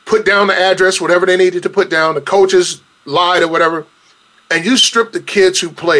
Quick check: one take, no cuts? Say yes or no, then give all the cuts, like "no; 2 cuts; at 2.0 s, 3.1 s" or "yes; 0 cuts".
yes; 0 cuts